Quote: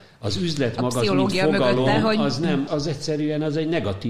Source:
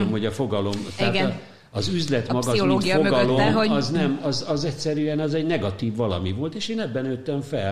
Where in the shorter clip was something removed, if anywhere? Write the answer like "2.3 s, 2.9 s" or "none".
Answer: 2.7 s

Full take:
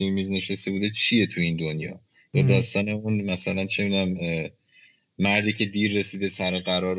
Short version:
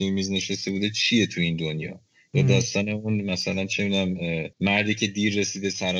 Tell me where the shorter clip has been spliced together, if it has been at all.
4.5 s

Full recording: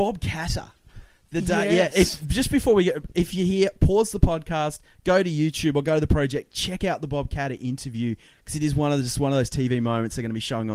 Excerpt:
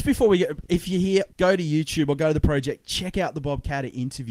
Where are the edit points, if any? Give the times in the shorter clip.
1.3 s

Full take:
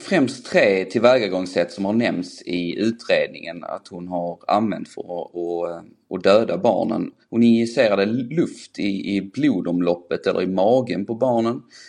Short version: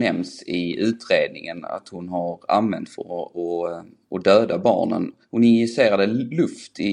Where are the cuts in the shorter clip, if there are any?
none

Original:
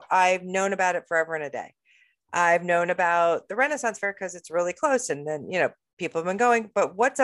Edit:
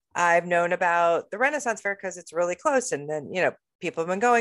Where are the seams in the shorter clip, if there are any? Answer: none

